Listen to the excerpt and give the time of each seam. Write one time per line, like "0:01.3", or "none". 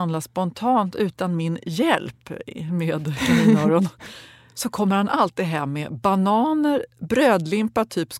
none